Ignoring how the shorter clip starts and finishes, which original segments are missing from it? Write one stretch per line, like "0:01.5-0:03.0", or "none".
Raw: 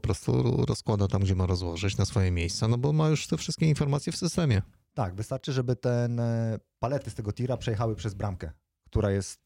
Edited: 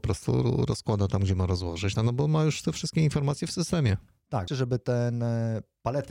0:02.0-0:02.6
0:05.1-0:05.4